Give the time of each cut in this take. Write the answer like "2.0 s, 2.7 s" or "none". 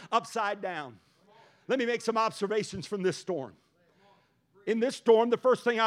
none

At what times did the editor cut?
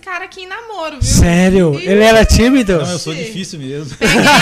none

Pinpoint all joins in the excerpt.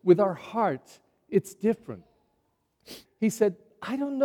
3.1 s

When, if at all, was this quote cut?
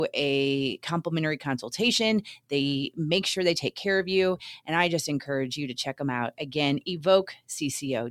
none

